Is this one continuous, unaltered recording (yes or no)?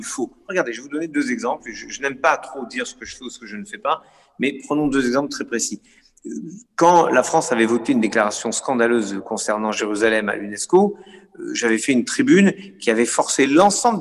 yes